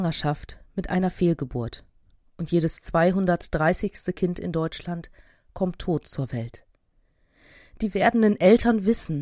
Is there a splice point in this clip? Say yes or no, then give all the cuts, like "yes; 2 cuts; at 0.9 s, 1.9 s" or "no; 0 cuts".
no; 0 cuts